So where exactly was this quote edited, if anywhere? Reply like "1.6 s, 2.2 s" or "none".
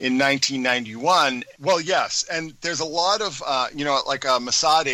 1.5 s